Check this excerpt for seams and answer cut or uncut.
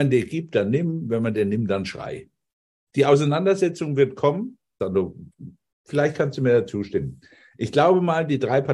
cut